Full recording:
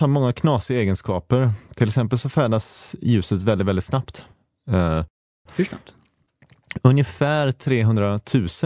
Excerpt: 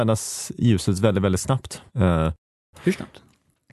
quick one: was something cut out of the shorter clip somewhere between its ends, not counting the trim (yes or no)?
yes